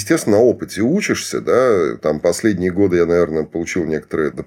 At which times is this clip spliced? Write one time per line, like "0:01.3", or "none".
none